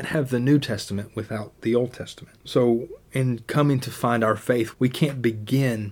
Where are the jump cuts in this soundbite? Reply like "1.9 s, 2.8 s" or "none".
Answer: 2.4 s, 4.7 s